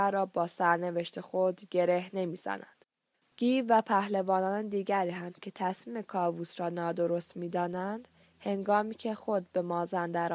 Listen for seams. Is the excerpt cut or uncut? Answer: cut